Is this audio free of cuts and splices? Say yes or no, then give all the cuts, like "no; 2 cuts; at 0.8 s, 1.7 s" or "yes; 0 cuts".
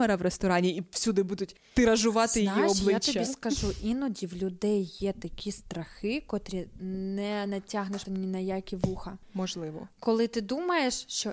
no; 1 cut; at 8.0 s